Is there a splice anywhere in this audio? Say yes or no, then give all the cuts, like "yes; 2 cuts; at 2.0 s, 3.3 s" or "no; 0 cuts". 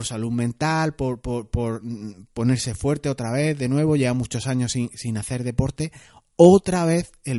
no; 0 cuts